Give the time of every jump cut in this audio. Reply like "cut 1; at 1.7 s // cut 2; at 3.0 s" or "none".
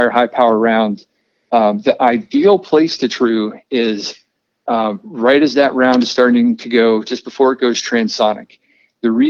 none